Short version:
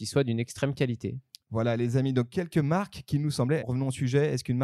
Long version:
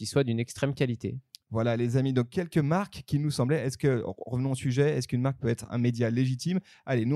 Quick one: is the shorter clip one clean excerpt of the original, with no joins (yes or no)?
no